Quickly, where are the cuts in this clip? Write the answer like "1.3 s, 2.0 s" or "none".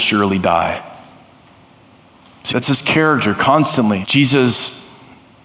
2.5 s, 4.0 s